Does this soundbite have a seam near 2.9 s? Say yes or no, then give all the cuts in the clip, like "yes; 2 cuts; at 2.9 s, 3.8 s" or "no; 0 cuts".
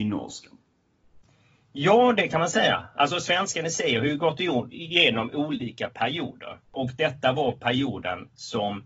no; 1 cut; at 6.6 s